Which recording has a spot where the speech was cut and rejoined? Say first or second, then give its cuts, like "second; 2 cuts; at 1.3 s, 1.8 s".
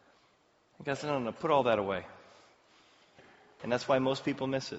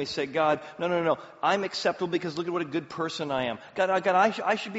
first; 1 cut; at 3.6 s